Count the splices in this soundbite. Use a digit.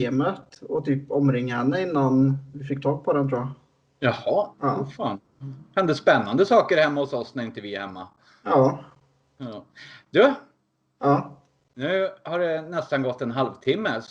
1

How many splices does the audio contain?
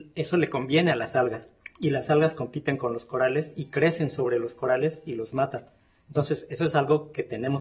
0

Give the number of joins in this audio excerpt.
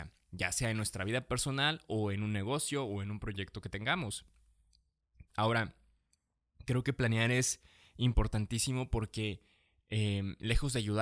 1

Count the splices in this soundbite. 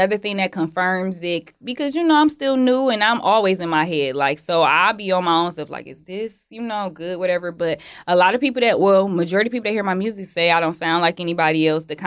0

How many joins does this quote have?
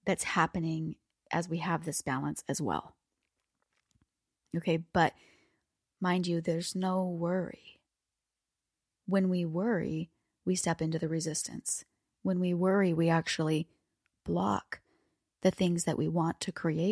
0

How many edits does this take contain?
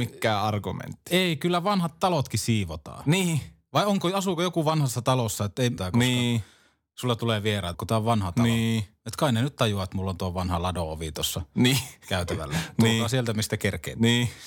2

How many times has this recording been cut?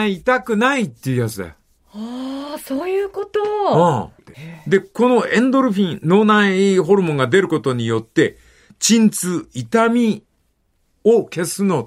1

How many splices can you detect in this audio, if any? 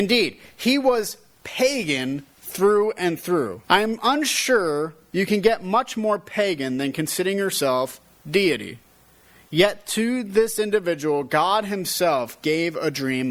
1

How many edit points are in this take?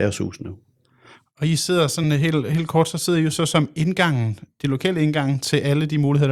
0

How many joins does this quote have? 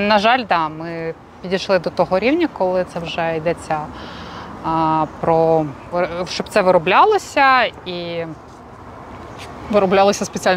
1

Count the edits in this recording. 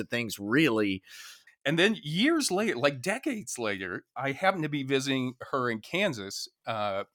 1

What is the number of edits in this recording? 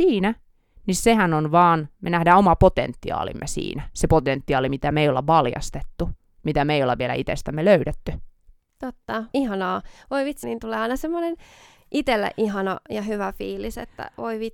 2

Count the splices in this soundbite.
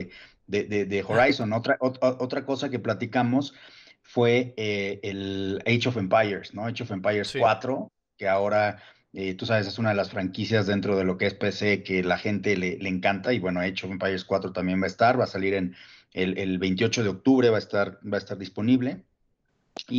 0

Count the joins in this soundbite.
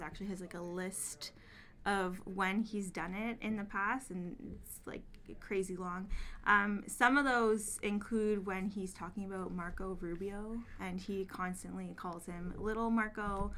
0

